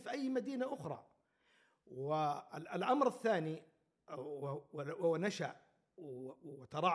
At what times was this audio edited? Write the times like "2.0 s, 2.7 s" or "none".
none